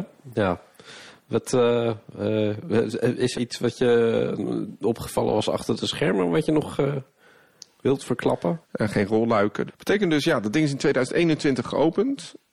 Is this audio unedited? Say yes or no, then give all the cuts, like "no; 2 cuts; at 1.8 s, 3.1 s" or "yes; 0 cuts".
no; 3 cuts; at 3.3 s, 8.6 s, 9.7 s